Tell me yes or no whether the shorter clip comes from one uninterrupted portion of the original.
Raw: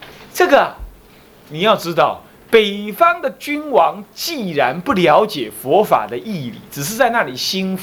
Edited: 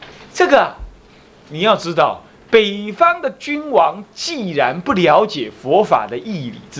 yes